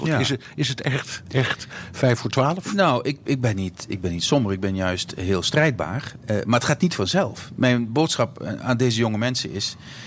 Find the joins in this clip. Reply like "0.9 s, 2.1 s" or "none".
none